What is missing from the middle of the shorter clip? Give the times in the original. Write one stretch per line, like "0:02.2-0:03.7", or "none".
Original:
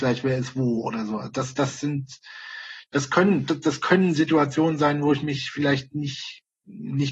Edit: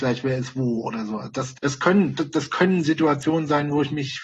0:01.5-0:02.9